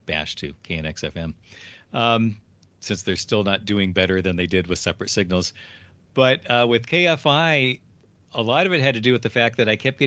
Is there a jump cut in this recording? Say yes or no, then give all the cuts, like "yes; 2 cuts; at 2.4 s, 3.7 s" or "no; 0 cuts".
no; 0 cuts